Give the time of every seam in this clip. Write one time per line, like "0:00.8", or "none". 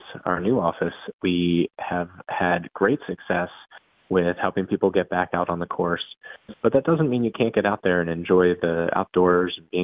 0:06.5